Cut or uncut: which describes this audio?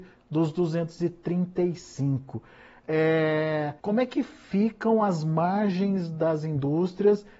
cut